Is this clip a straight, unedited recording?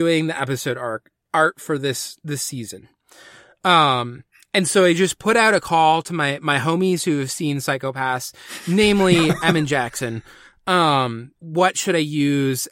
no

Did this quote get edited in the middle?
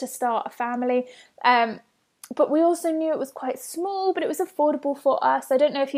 no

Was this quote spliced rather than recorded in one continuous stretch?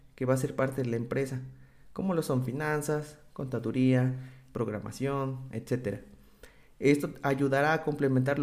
yes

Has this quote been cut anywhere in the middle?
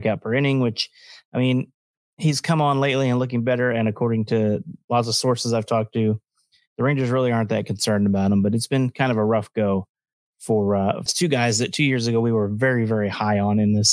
yes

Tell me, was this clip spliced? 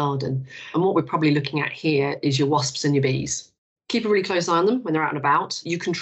no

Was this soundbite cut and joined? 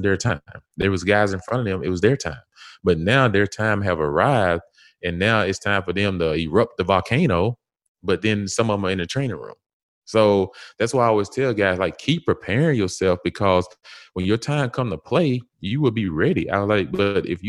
no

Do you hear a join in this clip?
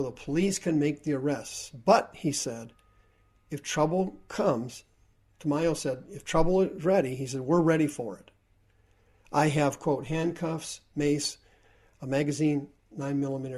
no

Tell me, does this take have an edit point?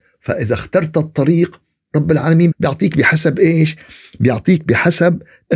yes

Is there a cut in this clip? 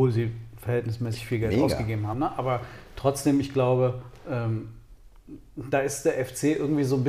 yes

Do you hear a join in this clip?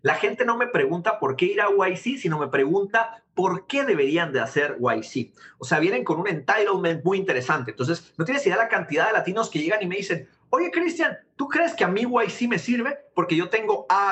no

